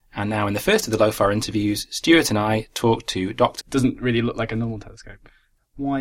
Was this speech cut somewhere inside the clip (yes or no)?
yes